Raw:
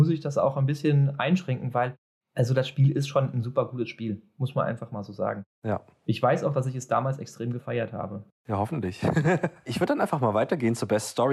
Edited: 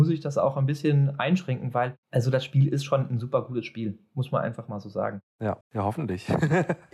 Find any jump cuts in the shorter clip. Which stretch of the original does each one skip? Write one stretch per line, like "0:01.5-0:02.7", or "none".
0:02.0-0:02.3
0:05.8-0:08.3